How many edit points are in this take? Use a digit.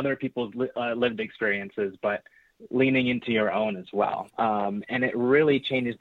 1